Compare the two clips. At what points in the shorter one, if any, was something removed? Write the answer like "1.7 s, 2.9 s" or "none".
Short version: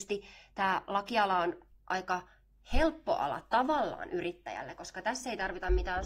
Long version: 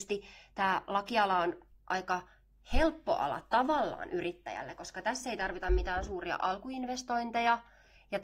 none